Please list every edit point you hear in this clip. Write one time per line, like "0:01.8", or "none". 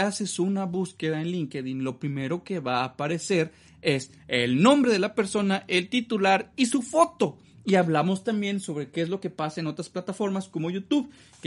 none